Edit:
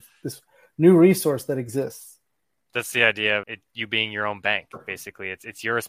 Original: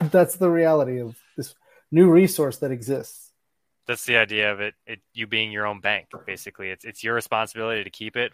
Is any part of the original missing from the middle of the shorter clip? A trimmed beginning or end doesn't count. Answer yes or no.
yes